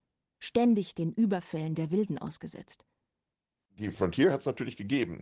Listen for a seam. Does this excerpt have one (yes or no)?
yes